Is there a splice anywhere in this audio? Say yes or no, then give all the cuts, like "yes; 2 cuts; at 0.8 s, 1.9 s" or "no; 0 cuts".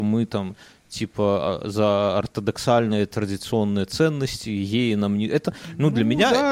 no; 0 cuts